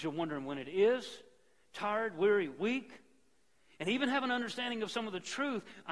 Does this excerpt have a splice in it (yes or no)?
no